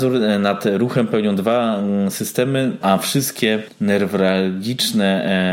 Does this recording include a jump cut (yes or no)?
yes